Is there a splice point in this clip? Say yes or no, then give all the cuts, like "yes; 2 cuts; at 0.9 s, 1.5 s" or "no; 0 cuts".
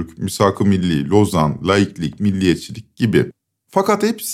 no; 0 cuts